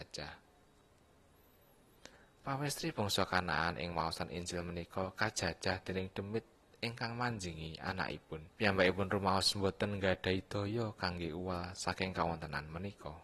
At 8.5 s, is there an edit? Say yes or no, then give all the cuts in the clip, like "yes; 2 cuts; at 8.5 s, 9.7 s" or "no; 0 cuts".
yes; 1 cut; at 8.5 s